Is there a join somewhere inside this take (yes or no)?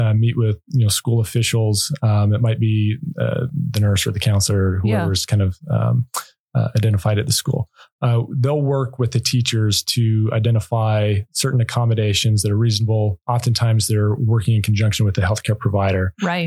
no